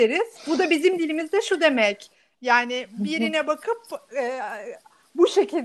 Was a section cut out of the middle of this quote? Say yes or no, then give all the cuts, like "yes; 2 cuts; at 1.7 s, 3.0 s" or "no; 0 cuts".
yes; 1 cut; at 2.3 s